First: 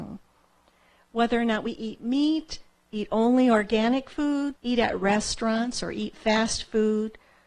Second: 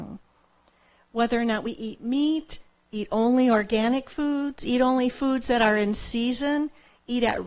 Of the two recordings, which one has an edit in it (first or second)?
first